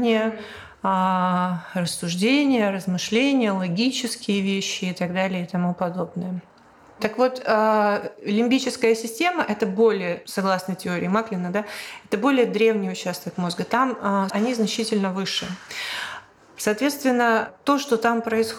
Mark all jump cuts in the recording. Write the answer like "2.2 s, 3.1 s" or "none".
14.3 s, 16.6 s